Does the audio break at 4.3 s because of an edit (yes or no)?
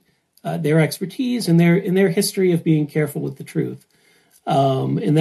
no